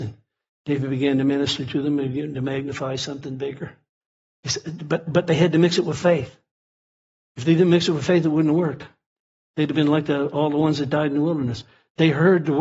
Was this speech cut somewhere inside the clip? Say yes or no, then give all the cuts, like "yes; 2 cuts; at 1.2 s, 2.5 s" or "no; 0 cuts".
no; 0 cuts